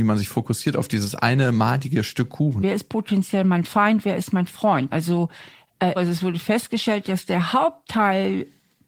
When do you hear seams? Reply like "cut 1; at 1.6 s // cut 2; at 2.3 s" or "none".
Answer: cut 1; at 2.6 s // cut 2; at 4.9 s // cut 3; at 6.0 s